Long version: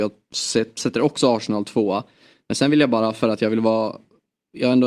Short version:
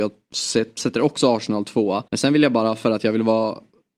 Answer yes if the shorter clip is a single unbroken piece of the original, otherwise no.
no